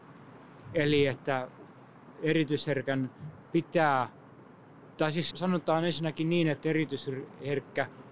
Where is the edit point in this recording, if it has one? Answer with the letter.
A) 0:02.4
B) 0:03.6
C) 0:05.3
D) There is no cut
C